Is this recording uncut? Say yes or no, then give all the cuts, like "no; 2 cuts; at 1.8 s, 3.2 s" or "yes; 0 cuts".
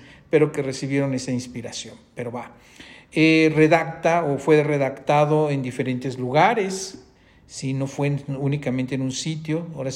yes; 0 cuts